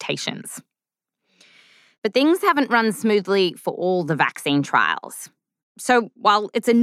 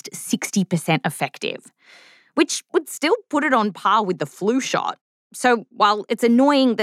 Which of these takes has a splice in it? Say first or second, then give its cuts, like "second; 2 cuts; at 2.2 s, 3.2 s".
first; 1 cut; at 5.6 s